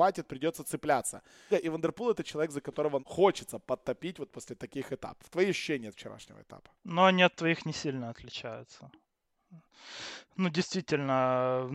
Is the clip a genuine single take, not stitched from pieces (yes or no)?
no